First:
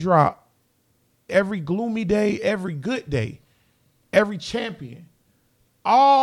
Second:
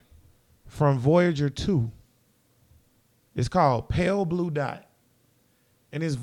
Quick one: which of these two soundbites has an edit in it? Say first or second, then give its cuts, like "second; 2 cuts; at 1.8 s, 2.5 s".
first; 1 cut; at 1.3 s